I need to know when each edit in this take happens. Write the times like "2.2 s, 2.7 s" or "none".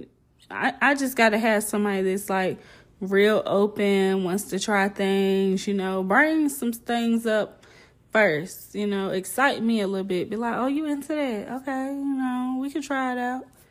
none